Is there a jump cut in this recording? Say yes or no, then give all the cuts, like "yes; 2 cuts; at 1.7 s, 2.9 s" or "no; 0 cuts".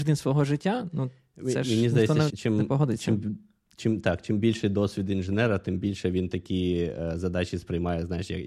yes; 1 cut; at 2.3 s